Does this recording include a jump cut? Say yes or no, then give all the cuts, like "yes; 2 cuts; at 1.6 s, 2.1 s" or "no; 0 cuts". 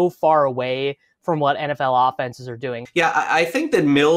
yes; 1 cut; at 2.9 s